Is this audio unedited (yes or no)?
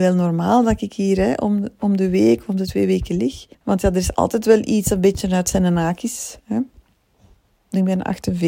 no